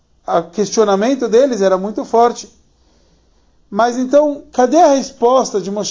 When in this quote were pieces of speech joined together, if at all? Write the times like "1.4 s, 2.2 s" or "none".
none